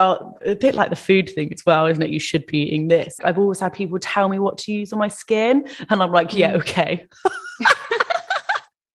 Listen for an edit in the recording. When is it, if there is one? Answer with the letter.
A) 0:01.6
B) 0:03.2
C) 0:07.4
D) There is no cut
B